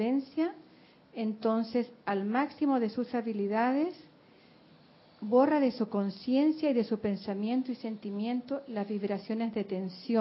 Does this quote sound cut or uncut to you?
uncut